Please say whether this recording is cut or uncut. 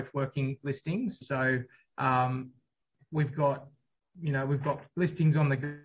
cut